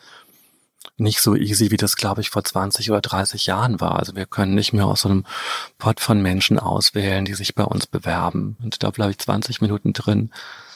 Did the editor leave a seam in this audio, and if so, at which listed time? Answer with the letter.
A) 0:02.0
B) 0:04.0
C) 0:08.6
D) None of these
C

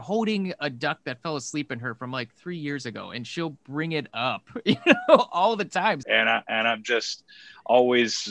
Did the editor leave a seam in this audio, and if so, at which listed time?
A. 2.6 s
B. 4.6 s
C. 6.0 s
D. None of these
C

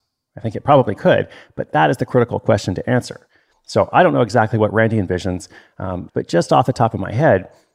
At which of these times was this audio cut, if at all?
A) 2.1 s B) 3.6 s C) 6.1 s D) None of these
C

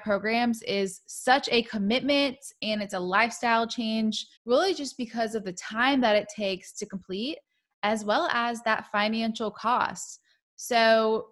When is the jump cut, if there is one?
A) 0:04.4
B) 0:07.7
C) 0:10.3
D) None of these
A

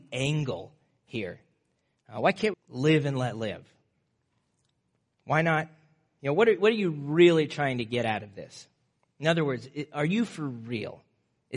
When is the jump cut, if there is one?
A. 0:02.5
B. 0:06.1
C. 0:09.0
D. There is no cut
A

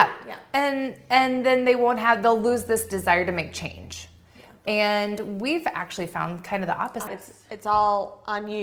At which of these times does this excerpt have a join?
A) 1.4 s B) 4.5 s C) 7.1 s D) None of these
C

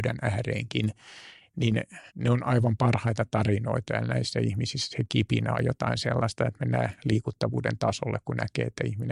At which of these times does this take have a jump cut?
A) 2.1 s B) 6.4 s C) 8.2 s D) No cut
A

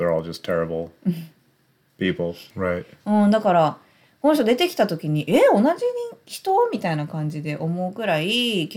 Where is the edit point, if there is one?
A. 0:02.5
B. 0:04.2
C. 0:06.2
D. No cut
A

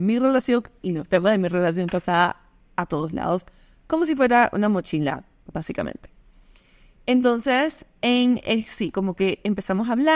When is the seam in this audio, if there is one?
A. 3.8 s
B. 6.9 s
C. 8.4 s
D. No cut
D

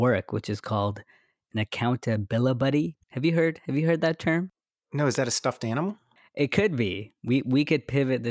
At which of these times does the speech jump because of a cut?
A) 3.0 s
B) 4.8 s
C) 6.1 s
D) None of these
A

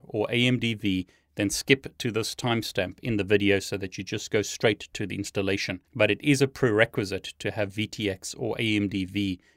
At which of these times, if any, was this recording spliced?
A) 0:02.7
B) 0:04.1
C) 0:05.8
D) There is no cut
C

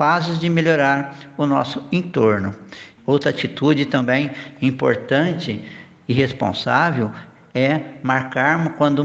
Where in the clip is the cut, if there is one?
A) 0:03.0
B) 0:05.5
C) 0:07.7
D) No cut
A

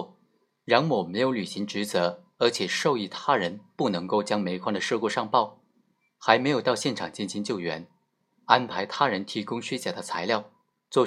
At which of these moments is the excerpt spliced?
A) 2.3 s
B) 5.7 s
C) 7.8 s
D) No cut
D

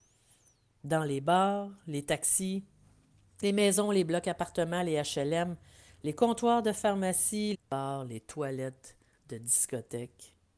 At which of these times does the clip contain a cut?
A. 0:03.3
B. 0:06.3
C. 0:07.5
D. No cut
C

